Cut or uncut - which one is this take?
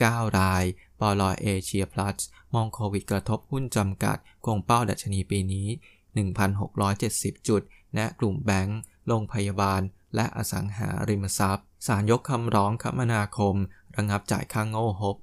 cut